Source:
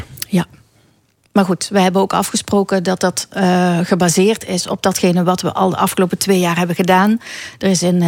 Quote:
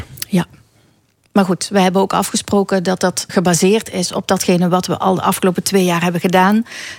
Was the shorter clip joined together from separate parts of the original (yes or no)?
yes